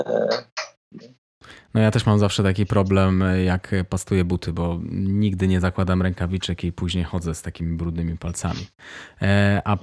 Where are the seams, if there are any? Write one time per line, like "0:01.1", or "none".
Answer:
0:01.0